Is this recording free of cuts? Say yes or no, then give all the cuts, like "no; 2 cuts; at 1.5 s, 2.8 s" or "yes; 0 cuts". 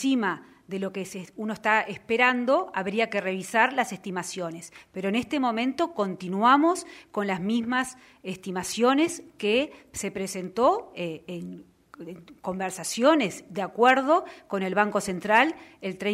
yes; 0 cuts